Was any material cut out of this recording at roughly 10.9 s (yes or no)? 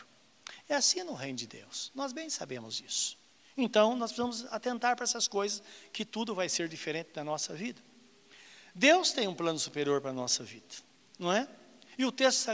no